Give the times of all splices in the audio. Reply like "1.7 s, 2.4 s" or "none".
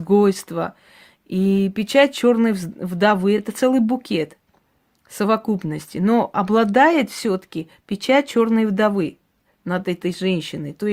none